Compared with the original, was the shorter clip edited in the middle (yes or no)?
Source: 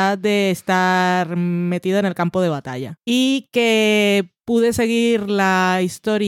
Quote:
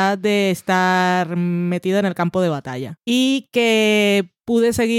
no